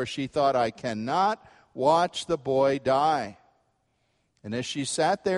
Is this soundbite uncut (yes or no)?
yes